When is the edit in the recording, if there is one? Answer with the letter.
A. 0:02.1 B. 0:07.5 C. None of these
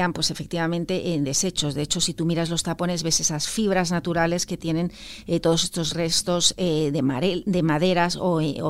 C